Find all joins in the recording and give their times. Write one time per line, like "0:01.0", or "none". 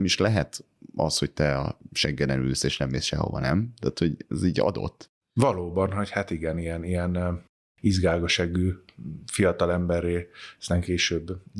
none